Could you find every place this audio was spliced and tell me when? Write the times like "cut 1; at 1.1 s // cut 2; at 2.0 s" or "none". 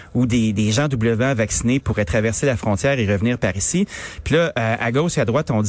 none